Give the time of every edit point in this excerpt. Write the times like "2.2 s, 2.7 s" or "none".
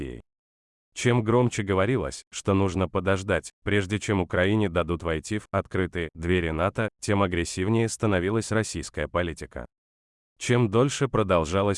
none